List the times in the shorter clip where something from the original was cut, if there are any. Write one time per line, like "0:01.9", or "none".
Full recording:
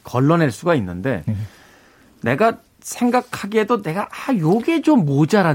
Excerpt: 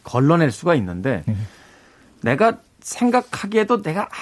none